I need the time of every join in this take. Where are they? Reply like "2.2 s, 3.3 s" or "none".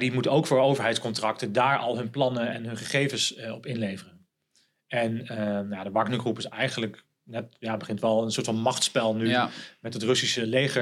none